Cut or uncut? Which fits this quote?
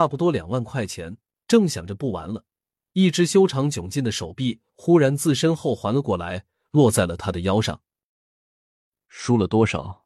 uncut